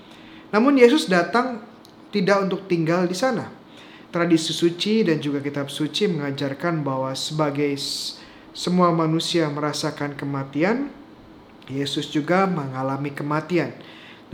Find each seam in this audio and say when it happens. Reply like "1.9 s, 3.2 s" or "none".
2.1 s, 4.1 s

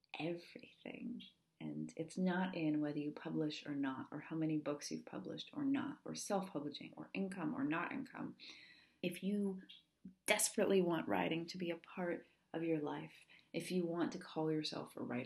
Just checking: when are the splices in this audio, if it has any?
6.9 s, 9.0 s

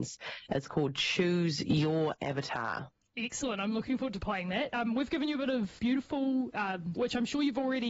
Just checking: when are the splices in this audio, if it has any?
5.8 s, 7.0 s

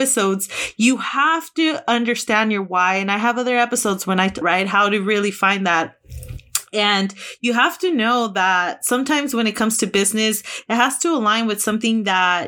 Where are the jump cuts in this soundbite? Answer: 4.4 s

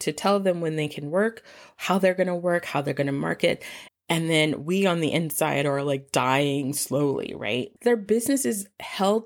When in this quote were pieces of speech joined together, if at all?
3.9 s, 7.8 s

